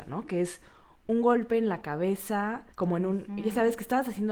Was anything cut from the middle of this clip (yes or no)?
yes